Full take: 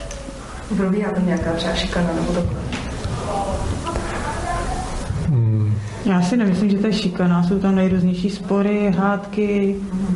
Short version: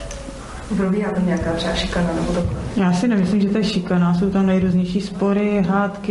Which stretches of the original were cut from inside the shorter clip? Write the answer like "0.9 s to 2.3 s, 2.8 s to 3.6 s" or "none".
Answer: 2.7 s to 6.0 s